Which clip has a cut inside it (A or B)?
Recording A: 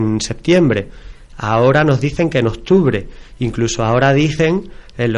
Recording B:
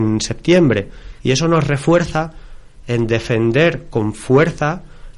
B